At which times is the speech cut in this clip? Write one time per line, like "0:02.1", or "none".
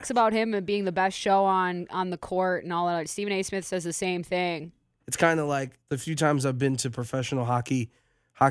0:05.0